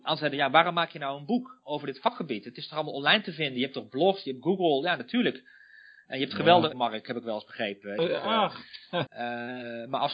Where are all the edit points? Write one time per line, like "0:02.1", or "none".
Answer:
0:06.7
0:08.0
0:09.1

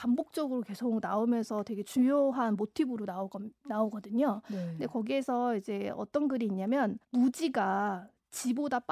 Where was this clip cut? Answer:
0:07.0

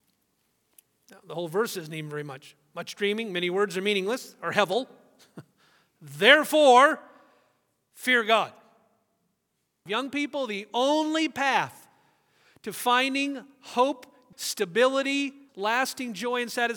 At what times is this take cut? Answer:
0:09.9
0:14.3
0:15.5

